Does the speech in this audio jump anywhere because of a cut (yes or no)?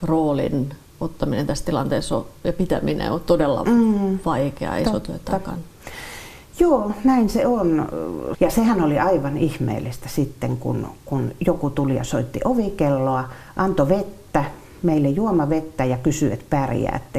yes